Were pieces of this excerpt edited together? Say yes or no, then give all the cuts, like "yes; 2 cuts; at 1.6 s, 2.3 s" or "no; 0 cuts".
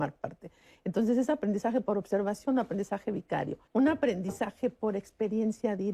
yes; 1 cut; at 3.7 s